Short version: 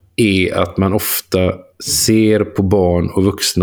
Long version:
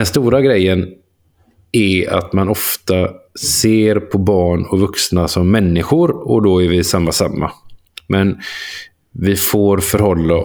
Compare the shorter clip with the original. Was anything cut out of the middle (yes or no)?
no